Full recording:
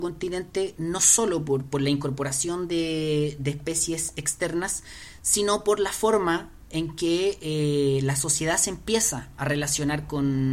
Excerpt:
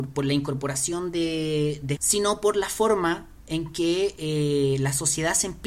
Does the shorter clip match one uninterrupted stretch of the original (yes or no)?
no